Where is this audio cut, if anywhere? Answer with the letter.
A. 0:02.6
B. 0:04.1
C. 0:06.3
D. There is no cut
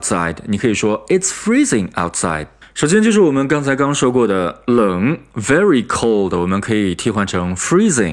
A